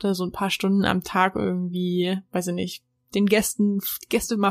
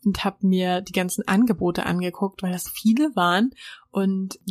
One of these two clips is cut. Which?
second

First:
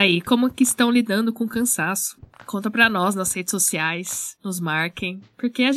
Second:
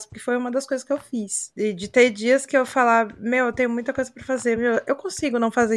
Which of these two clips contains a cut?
second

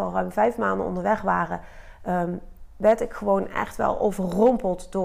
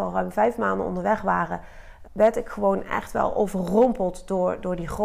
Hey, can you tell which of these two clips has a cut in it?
second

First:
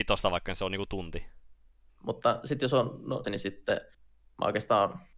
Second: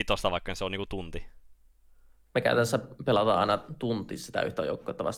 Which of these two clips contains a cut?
first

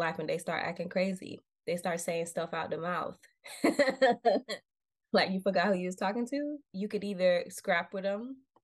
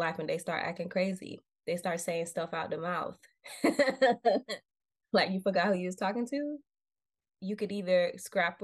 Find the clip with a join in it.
first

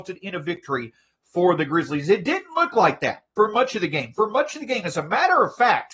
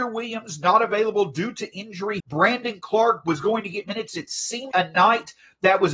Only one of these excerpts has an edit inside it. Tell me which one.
second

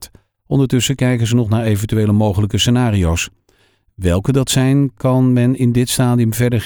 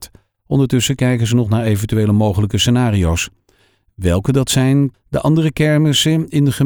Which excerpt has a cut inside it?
second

